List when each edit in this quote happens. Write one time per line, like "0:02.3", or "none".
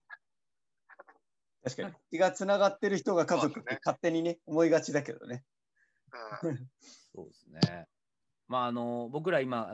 0:06.7